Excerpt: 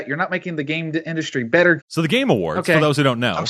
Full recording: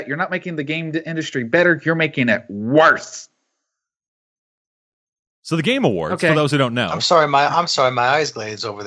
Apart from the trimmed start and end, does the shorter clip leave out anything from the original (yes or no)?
yes